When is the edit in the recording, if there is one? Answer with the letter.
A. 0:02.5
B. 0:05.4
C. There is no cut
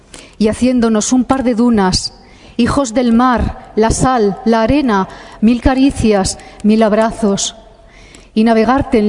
B